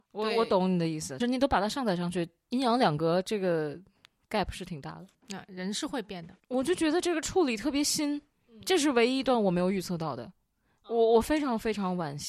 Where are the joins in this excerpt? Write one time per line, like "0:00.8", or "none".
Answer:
0:01.2